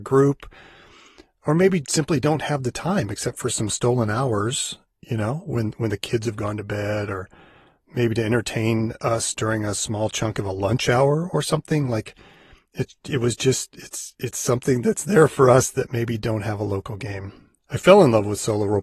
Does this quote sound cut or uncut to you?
cut